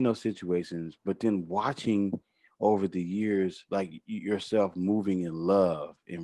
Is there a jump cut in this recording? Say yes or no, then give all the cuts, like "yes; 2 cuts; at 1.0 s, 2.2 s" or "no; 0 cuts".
no; 0 cuts